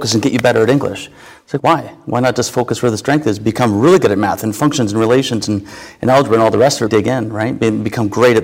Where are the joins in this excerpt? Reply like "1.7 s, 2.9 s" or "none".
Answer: 1.6 s, 6.9 s